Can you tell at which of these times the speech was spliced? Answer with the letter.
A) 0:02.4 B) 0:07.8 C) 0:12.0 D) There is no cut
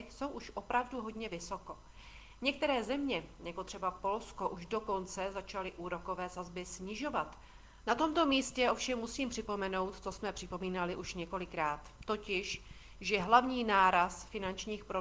B